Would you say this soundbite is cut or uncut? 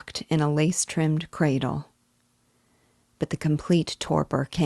uncut